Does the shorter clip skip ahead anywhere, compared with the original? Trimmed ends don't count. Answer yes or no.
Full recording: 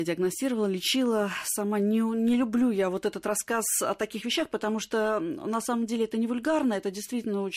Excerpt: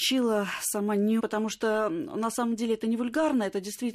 yes